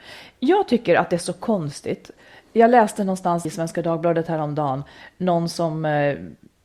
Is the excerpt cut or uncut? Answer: cut